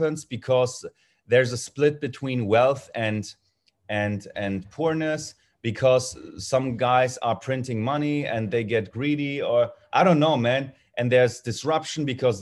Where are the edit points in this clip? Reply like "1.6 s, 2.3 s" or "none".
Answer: none